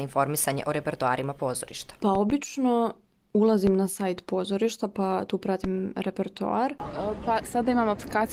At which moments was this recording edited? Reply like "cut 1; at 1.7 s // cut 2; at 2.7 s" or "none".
cut 1; at 2.0 s